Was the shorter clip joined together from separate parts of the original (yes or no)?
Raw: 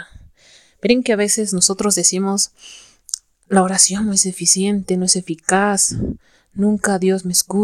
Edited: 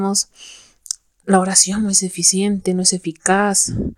no